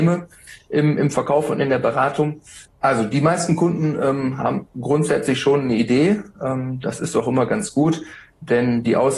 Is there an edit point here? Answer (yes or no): yes